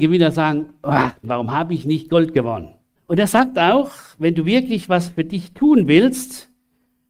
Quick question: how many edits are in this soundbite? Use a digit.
2